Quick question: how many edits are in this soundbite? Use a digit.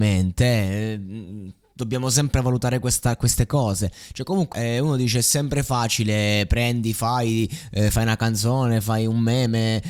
1